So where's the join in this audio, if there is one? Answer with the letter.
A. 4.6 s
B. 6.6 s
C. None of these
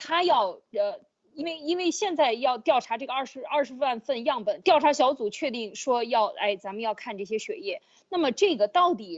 A